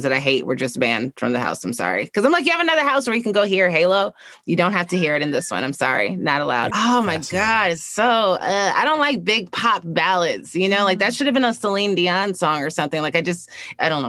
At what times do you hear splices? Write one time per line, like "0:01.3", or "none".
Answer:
0:06.7